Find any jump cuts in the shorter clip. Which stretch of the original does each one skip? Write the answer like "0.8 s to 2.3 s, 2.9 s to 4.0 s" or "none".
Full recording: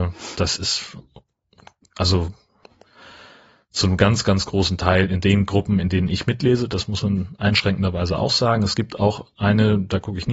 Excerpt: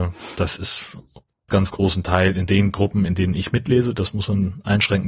1.5 s to 4.2 s